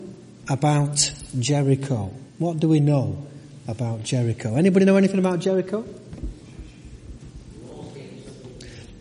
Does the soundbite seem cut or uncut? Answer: cut